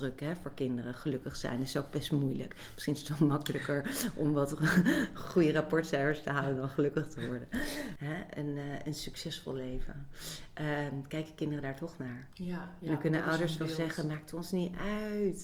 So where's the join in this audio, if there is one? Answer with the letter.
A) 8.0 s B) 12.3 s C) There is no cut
A